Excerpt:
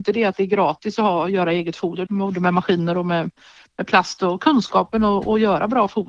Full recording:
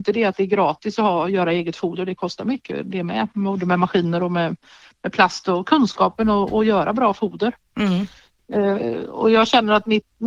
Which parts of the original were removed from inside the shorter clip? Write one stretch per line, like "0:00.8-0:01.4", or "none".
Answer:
0:02.1-0:03.3